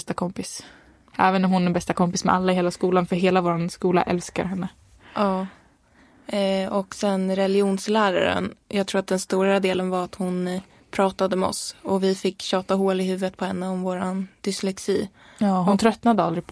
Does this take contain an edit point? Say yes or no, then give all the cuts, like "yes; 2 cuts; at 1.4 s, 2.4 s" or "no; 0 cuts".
no; 0 cuts